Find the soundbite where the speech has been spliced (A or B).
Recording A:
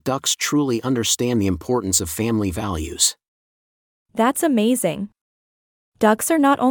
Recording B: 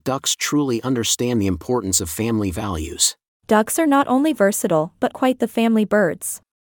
B